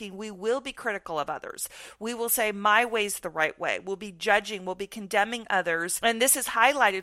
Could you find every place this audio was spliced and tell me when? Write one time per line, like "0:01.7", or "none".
none